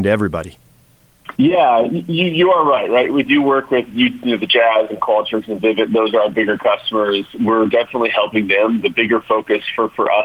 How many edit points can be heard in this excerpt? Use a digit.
2